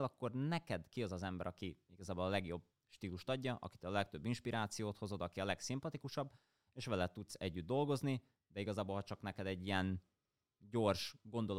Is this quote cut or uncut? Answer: uncut